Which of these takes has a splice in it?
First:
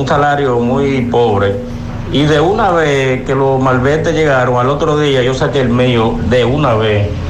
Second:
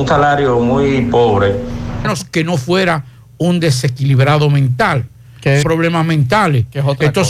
second; 2 cuts; at 2.0 s, 5.6 s

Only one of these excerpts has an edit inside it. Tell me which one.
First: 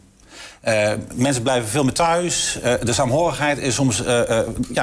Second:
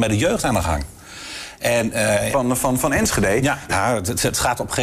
second; 2 cuts; at 2.3 s, 3.7 s

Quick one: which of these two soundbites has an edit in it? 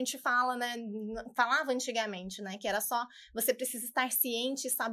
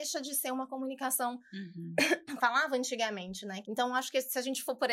second; 2 cuts; at 2.4 s, 3.6 s

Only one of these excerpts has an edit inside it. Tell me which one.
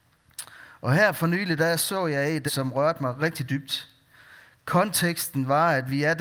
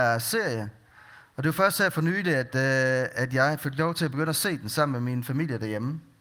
first; 1 cut; at 2.5 s

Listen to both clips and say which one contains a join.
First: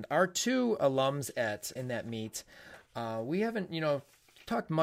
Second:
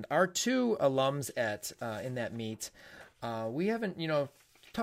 first; 1 cut; at 1.8 s

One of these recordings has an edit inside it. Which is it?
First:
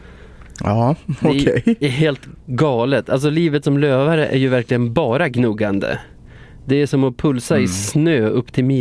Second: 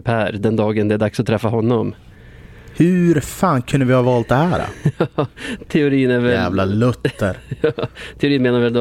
second; 1 cut; at 5.7 s

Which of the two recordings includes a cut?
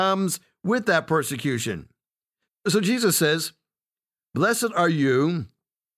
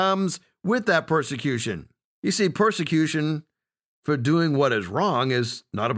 second; 1 cut; at 2.1 s

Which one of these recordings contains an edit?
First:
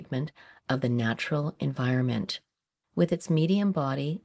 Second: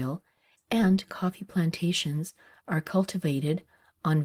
first; 1 cut; at 2.8 s

